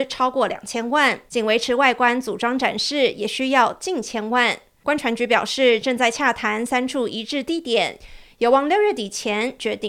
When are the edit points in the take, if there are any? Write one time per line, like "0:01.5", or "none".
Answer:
none